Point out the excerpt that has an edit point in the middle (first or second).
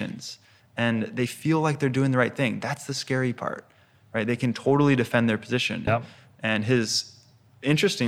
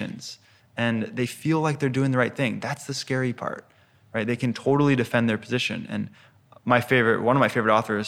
first